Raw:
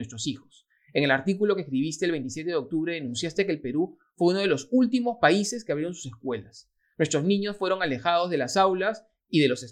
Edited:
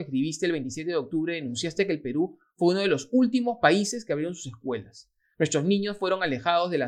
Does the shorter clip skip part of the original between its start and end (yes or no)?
no